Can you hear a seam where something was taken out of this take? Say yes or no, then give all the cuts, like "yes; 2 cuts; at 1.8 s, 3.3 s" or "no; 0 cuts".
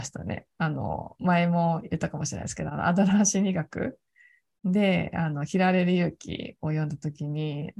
no; 0 cuts